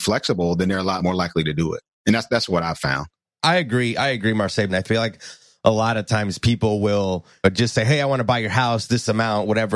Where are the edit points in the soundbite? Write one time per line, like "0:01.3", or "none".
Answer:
0:01.0
0:04.7